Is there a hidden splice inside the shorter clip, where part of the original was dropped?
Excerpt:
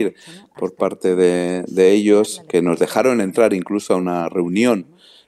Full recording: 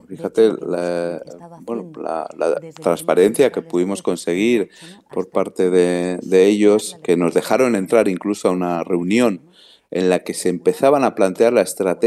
no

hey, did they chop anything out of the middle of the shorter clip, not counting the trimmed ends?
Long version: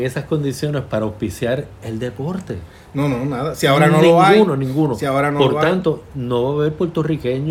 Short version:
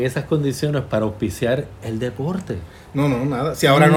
no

